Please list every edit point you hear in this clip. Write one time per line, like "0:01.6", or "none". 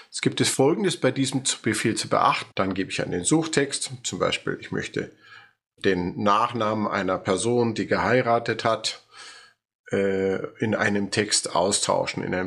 0:02.5
0:05.8